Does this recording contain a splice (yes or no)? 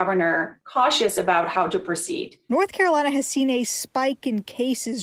no